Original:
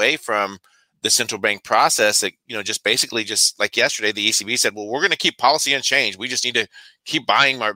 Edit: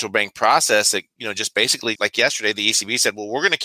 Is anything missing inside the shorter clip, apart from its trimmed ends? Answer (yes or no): yes